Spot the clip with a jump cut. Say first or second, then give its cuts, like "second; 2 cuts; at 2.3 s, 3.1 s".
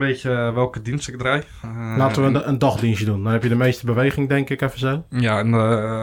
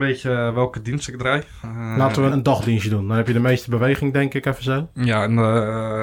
second; 1 cut; at 2.3 s